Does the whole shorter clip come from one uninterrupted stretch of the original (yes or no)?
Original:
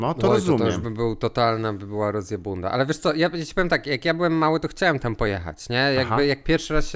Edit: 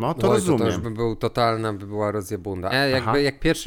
no